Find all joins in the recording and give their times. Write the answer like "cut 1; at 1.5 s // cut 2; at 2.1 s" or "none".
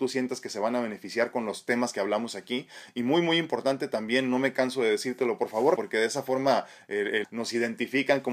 cut 1; at 5.8 s // cut 2; at 7.2 s